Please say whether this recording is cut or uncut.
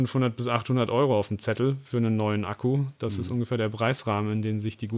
uncut